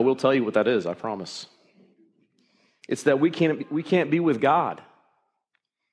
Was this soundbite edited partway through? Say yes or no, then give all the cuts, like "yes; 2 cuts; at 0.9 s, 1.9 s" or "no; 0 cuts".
no; 0 cuts